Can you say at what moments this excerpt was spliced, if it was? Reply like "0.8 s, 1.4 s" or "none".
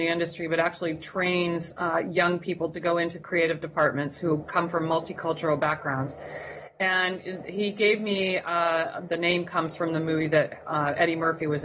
9.1 s